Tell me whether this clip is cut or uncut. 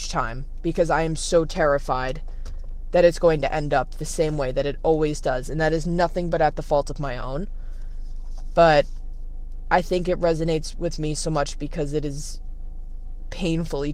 uncut